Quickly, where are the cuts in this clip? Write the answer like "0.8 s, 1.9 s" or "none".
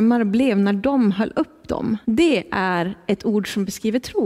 2.0 s